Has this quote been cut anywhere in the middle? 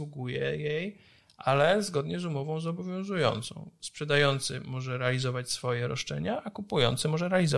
no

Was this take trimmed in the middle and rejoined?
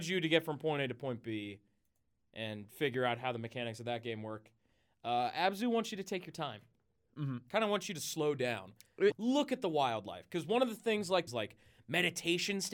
yes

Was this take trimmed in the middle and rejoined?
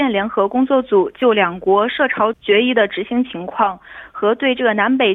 yes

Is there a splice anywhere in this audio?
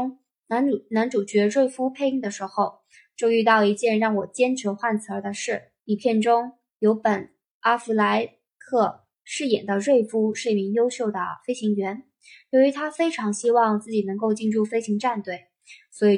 yes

